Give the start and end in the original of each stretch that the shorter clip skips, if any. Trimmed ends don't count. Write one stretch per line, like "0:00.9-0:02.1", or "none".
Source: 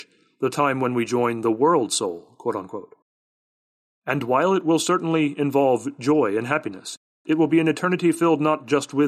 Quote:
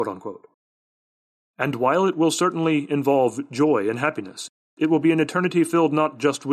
none